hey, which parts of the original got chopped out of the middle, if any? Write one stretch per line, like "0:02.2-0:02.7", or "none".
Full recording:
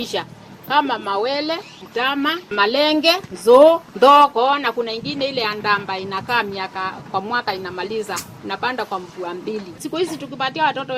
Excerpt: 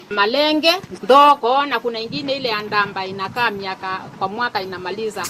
0:03.4-0:03.9